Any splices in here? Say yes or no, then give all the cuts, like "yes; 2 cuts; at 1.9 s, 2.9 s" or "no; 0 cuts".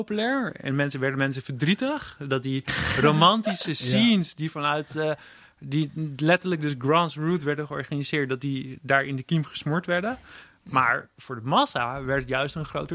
no; 0 cuts